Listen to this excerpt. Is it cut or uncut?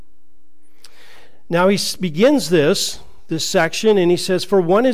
uncut